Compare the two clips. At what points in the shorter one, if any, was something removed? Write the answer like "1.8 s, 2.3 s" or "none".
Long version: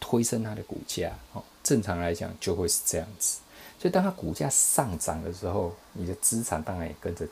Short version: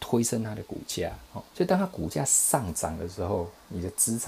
1.5 s